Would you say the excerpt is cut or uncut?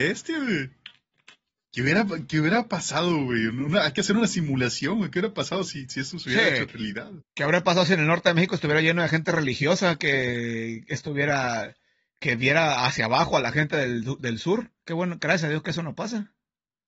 uncut